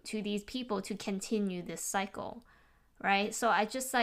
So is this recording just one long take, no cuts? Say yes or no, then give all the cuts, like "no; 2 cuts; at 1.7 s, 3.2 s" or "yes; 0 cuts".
yes; 0 cuts